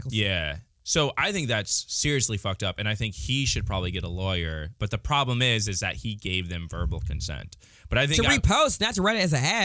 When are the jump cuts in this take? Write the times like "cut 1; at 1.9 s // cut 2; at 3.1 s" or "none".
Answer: none